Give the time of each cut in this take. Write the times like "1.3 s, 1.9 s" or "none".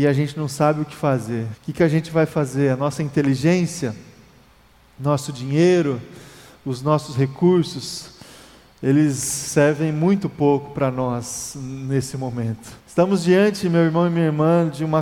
1.5 s, 12.8 s